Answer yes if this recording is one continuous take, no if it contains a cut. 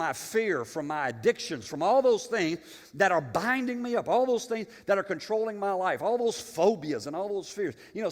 yes